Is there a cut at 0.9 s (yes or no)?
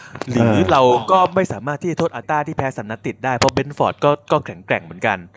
no